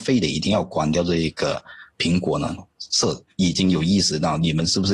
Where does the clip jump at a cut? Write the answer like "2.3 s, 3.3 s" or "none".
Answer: 2.6 s

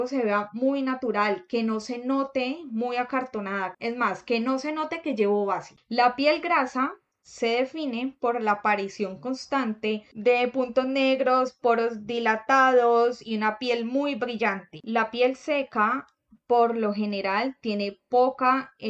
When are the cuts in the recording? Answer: 3.7 s, 5.8 s, 14.8 s

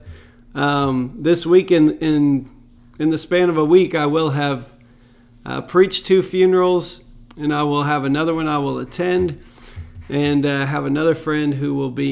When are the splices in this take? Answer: none

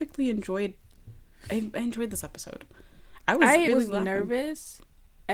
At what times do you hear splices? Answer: 3.7 s

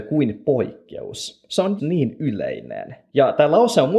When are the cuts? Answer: 1.8 s

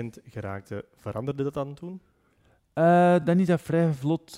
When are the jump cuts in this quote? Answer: none

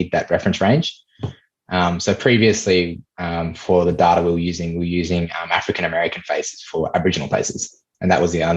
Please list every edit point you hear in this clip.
none

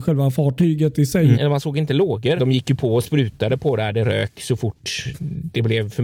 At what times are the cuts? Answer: 1.3 s, 2.4 s

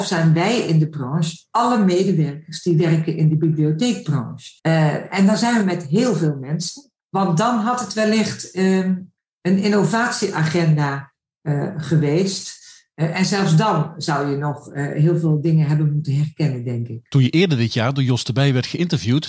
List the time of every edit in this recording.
4.6 s, 7.0 s

